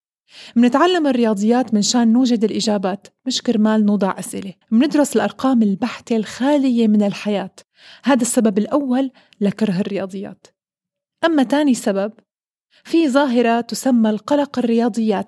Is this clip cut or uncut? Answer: cut